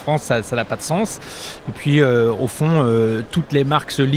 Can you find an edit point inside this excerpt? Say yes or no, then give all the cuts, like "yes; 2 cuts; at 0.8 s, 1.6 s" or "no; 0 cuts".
no; 0 cuts